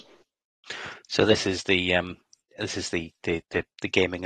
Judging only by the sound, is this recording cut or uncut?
uncut